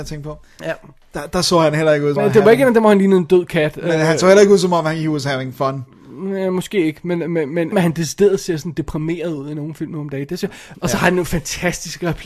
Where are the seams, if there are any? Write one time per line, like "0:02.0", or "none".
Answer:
0:02.2
0:07.7
0:10.7